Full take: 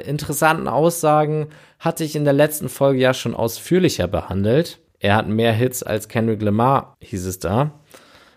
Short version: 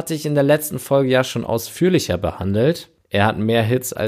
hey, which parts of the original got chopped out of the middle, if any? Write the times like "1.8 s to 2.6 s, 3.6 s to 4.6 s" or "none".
none